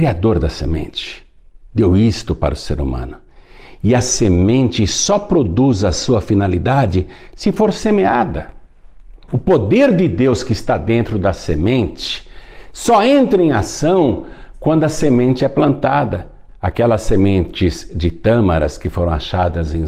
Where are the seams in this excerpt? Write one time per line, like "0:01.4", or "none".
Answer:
0:16.5